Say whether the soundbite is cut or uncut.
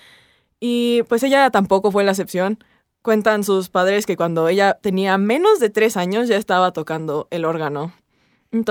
uncut